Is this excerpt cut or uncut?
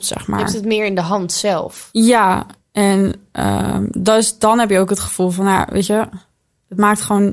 uncut